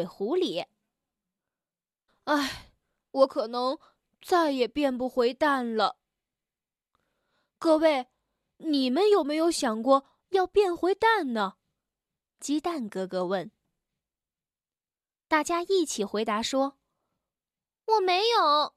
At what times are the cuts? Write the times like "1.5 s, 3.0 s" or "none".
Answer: 2.1 s